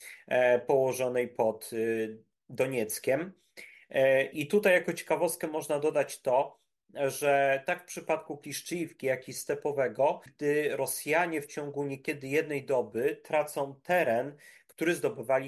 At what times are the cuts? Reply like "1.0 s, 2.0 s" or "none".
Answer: 4.3 s, 10.3 s

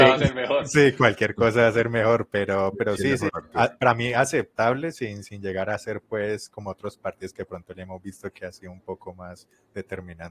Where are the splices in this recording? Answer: 3.3 s

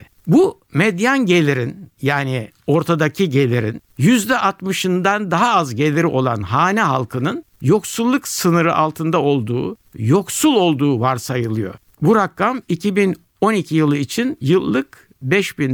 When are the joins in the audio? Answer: none

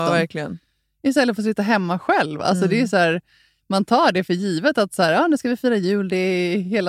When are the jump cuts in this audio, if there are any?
none

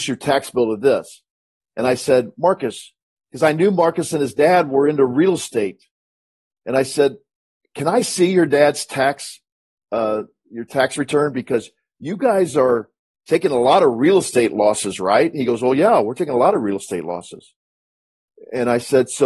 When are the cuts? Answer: none

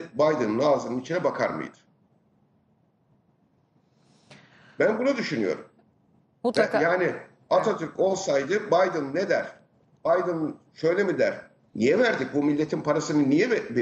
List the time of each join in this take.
11.7 s

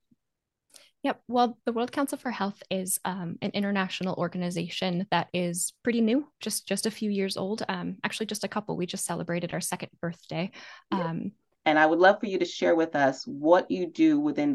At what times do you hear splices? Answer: 11.5 s

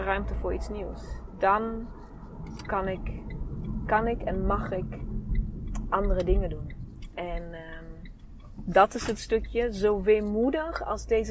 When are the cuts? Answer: none

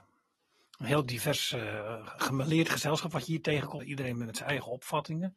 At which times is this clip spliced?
3.8 s

